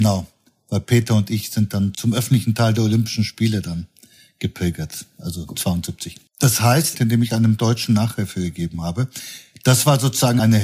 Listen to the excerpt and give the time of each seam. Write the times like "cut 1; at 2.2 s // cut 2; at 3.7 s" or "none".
cut 1; at 6.9 s